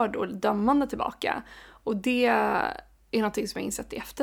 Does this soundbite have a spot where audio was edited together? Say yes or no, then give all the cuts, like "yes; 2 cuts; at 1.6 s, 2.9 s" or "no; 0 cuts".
no; 0 cuts